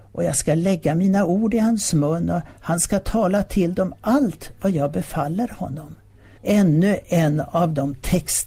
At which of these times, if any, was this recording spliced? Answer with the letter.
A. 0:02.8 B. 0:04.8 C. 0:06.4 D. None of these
C